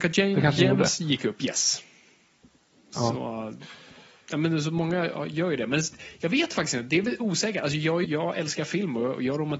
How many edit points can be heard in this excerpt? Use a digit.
1